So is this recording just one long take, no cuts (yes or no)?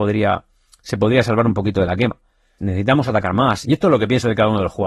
no